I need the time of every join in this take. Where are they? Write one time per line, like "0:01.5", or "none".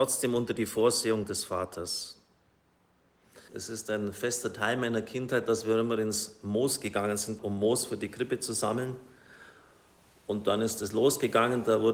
0:03.5
0:07.4